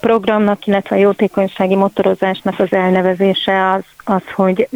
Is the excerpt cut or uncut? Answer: uncut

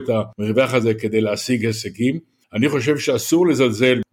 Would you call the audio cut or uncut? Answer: uncut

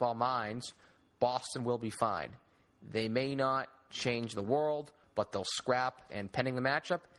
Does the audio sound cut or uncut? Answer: cut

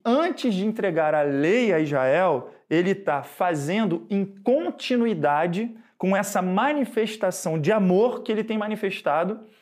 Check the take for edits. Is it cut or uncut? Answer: uncut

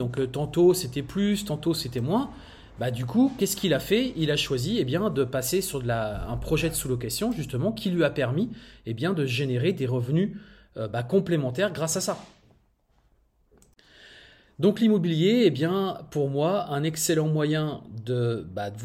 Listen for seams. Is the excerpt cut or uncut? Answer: uncut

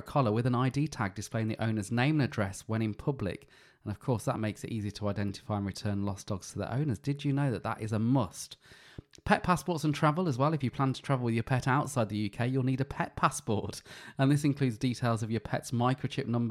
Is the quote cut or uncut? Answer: uncut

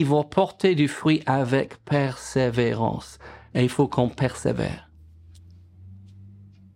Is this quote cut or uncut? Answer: uncut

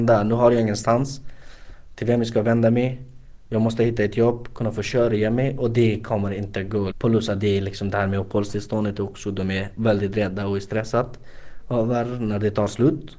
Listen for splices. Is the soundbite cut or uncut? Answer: cut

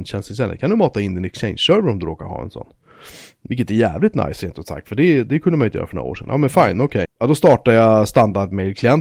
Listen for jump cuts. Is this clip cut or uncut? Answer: cut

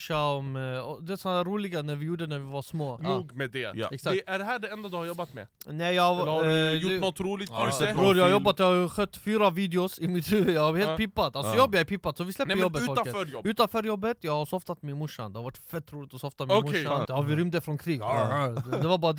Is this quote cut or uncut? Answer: cut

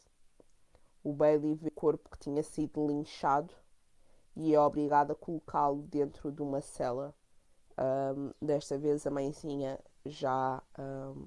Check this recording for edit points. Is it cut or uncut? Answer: cut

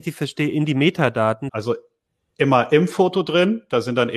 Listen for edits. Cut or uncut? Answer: cut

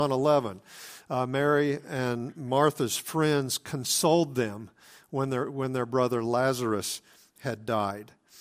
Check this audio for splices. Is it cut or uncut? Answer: uncut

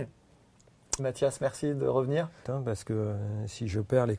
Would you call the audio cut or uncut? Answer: cut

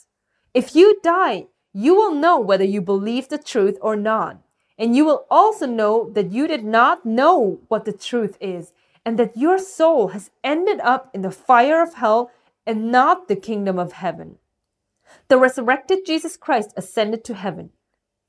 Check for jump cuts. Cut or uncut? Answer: uncut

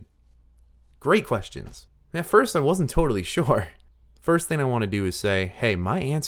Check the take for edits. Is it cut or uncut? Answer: cut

